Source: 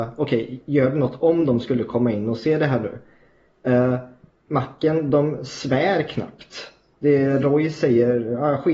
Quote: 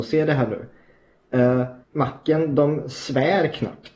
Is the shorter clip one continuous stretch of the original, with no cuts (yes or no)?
no